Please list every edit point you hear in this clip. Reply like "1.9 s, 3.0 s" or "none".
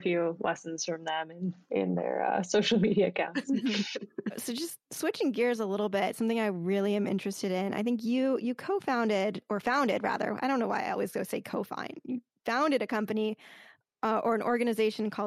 none